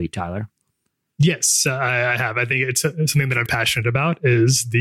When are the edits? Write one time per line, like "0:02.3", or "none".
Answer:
0:03.5